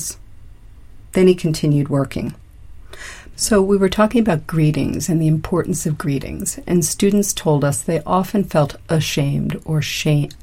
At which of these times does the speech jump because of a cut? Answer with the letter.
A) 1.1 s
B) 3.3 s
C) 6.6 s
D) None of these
B